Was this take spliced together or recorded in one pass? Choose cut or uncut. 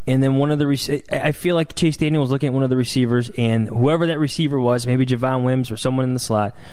uncut